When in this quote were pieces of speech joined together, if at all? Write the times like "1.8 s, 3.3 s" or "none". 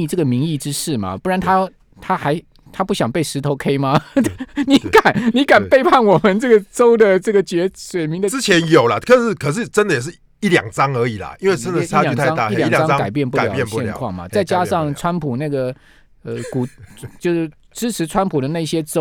none